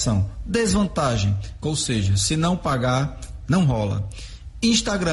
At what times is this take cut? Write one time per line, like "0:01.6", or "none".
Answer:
0:01.6